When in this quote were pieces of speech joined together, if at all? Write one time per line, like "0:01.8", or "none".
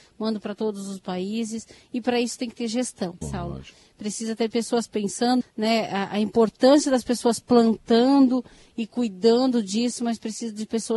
0:03.2
0:05.4

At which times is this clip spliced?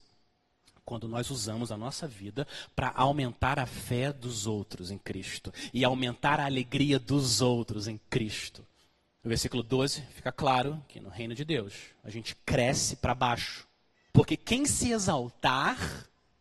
0:09.2
0:14.1

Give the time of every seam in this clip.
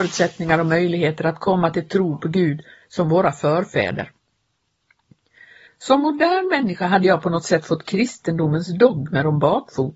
0:05.7

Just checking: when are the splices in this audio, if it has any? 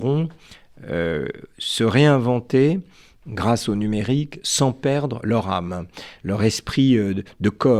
none

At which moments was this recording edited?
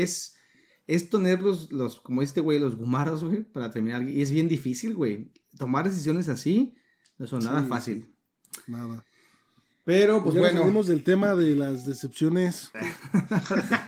0:12.7

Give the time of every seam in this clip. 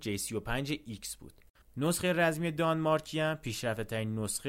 0:01.6

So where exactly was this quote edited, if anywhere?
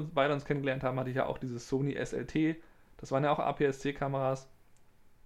none

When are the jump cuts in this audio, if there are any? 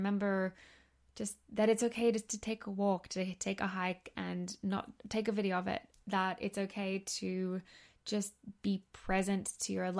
none

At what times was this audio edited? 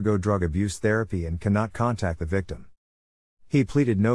none

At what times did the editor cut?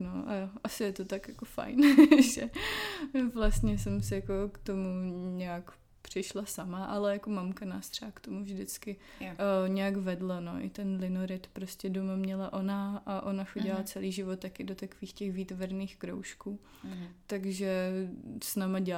none

